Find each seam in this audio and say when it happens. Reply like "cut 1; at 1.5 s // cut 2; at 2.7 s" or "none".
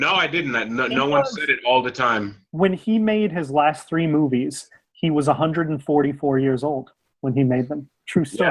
none